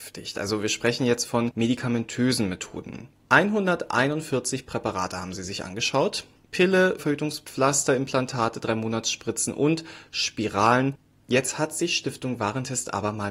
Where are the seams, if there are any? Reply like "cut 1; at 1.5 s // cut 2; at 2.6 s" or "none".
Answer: cut 1; at 7.0 s // cut 2; at 11.2 s